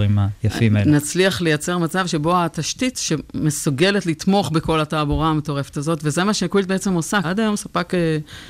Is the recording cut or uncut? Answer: cut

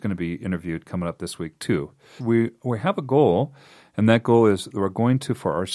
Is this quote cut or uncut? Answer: cut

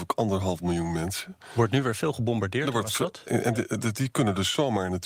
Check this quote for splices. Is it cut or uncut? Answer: uncut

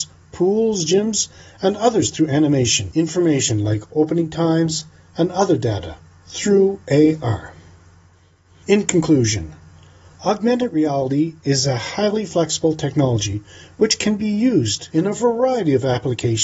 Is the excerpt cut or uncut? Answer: uncut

